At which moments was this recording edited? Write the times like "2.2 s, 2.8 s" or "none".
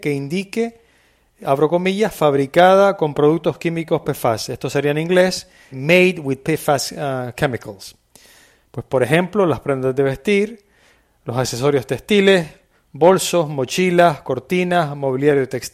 5.7 s, 8.6 s